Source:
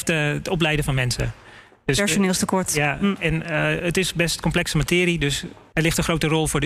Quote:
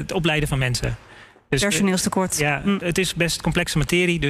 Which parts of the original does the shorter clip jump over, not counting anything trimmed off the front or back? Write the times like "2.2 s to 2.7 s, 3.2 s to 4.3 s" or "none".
3.2 s to 3.8 s